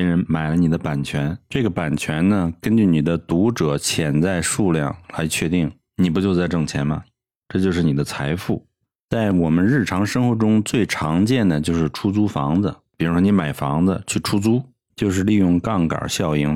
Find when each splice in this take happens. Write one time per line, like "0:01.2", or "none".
0:14.9